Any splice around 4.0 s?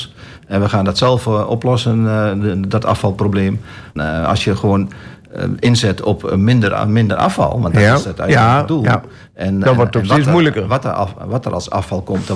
yes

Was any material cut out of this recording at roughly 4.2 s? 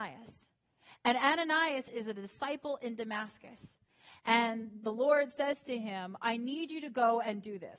no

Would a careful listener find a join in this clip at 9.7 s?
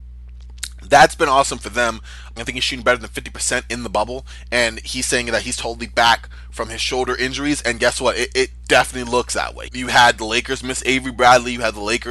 yes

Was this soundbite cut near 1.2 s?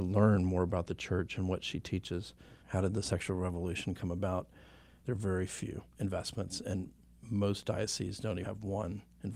no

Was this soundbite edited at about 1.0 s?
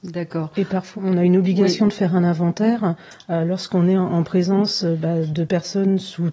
yes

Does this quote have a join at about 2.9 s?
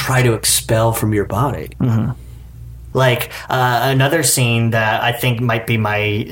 yes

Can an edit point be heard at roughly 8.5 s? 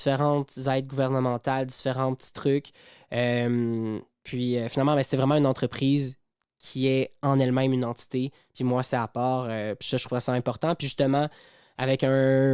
no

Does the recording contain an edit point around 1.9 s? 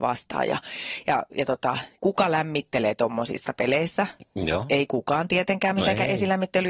yes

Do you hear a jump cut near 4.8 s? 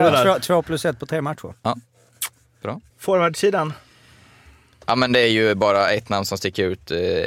no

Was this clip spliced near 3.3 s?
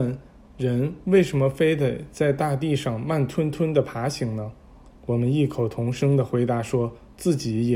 no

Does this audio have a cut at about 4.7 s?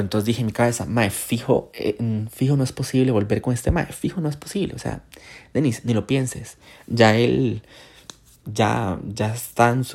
no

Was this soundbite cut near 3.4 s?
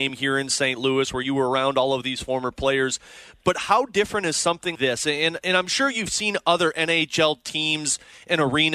no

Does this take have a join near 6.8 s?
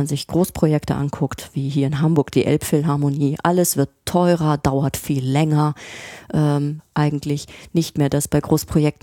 yes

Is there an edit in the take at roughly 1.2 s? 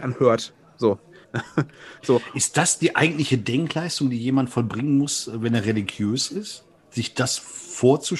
yes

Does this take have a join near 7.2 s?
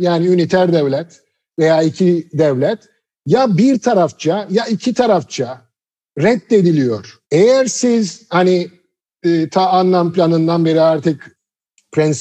yes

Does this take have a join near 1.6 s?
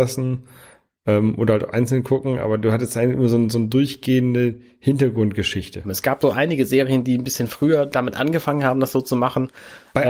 no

